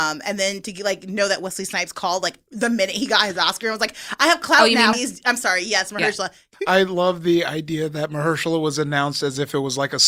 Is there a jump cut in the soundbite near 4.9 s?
yes; 2 cuts; at 4.9 s, 6.5 s

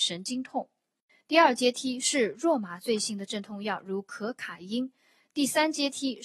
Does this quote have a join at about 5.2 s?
no; 1 cut; at 1.1 s

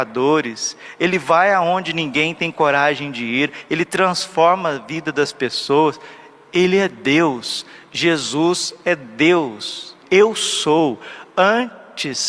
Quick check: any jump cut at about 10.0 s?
yes; 1 cut; at 10.0 s

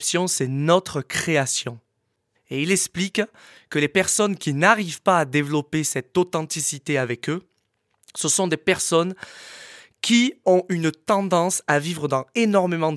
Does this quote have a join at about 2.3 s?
yes; 2 cuts; at 2.3 s, 10.4 s

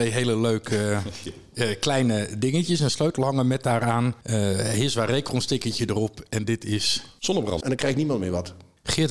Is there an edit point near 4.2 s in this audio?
no; 1 cut; at 7.6 s

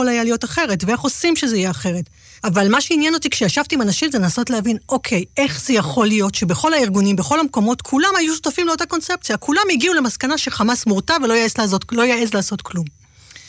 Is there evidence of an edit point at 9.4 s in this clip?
no; 1 cut; at 2.4 s

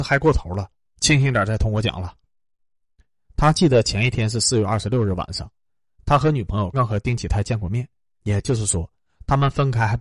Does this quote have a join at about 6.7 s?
yes; 2 cuts; at 6.7 s, 8.2 s

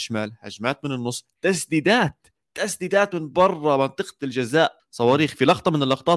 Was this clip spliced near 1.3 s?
no; 1 cut; at 4.8 s

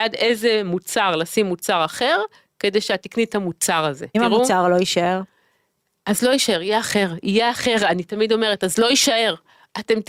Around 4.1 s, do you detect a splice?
yes; 1 cut; at 4.1 s

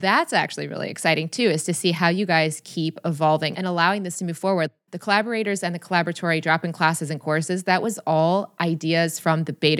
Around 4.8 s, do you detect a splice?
no; 1 cut; at 3.5 s

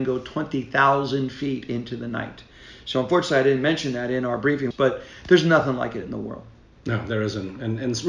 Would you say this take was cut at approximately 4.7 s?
yes; 1 cut; at 4.7 s

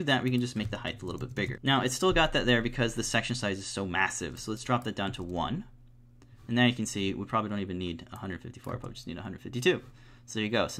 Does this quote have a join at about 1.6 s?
yes; 1 cut; at 1.6 s

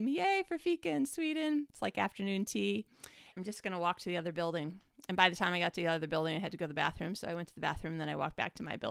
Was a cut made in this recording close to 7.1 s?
no; 1 cut; at 3.3 s

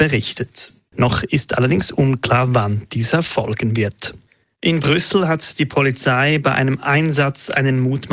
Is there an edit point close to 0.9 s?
yes; 1 cut; at 0.9 s

